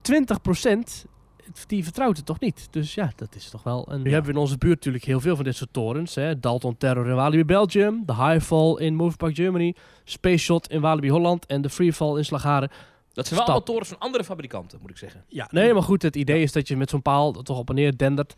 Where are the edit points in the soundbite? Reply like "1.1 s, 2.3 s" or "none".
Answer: 4.1 s